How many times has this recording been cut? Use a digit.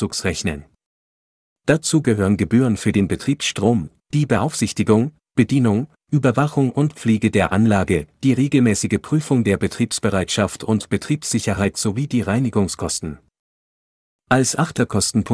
0